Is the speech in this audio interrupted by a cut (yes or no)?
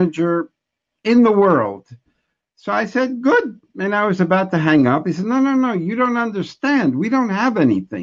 no